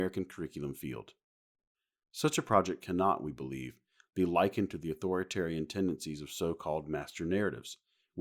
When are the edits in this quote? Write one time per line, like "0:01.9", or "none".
none